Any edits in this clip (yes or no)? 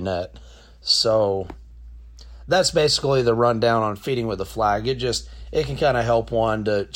no